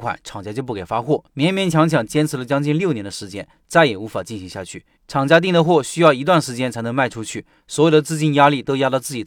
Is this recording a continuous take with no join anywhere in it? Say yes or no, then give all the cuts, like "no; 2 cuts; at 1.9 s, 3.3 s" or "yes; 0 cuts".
no; 3 cuts; at 1.3 s, 5.0 s, 7.6 s